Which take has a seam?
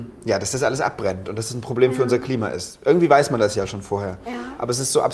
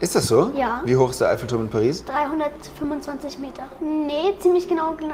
second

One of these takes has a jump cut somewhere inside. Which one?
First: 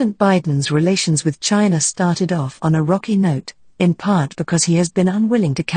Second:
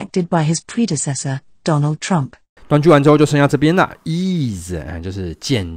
second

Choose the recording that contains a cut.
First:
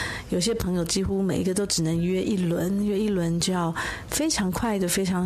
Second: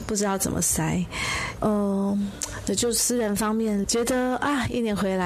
second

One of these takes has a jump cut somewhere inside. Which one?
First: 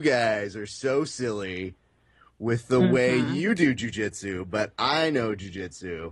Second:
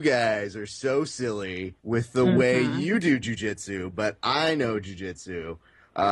second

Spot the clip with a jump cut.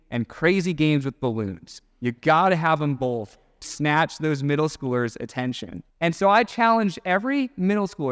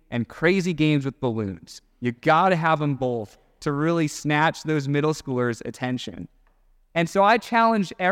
first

